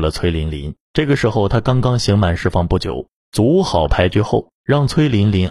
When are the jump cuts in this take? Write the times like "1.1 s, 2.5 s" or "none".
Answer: 3.2 s, 4.6 s